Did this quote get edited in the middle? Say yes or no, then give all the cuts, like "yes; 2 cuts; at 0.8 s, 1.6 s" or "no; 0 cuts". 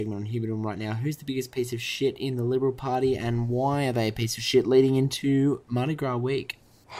no; 0 cuts